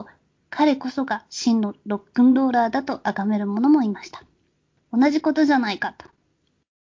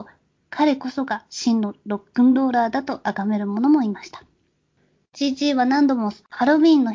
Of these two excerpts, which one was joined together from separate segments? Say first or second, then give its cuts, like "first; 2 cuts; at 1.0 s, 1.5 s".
first; 1 cut; at 4.8 s